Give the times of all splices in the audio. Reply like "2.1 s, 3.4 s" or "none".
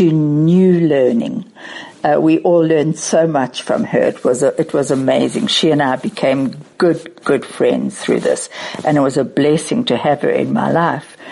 none